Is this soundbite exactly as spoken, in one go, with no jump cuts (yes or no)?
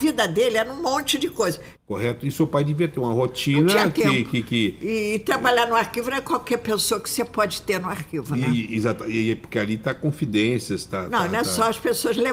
no